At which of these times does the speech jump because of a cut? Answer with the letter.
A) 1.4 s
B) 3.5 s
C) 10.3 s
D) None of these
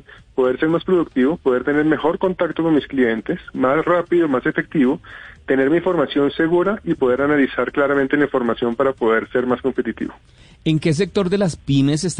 D